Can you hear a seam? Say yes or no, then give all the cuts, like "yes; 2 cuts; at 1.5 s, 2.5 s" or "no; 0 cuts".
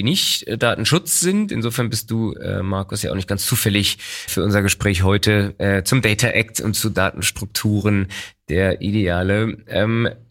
yes; 1 cut; at 4.3 s